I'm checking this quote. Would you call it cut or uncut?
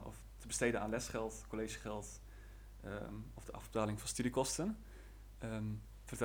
uncut